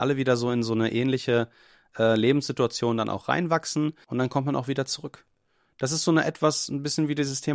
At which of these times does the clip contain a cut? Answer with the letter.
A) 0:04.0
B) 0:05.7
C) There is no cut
A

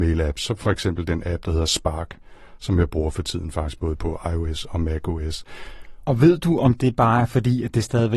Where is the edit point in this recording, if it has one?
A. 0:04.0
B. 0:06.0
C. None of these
A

